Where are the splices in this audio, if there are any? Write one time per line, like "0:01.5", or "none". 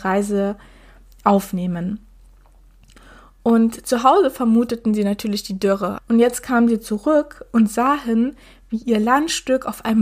0:06.0